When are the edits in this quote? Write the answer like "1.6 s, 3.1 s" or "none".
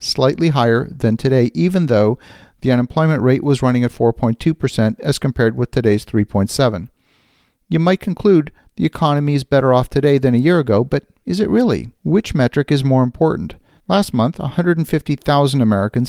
12.0 s, 13.8 s